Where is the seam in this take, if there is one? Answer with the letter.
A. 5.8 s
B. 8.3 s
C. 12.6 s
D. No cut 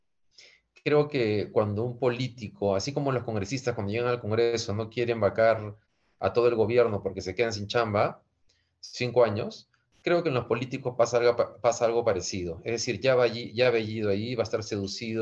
D